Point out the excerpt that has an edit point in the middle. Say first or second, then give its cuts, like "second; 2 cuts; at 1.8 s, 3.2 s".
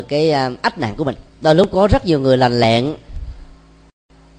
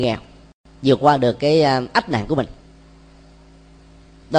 first; 1 cut; at 1.3 s